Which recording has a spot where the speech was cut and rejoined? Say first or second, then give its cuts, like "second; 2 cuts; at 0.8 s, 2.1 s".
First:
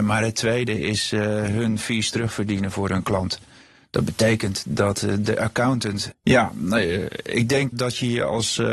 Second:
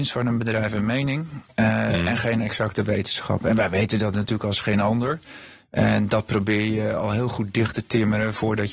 first; 2 cuts; at 6.1 s, 7.7 s